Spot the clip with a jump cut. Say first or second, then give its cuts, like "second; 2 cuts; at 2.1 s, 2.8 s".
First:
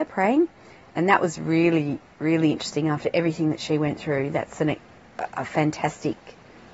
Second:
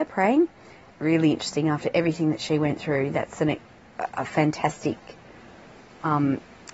second; 1 cut; at 0.9 s